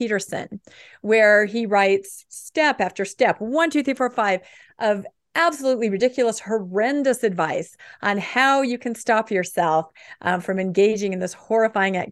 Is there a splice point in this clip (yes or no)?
no